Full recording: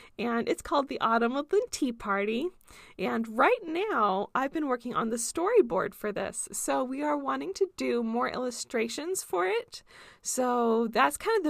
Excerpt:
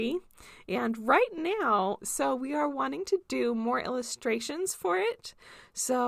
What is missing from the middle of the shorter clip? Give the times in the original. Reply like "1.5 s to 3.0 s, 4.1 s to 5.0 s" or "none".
4.3 s to 6.5 s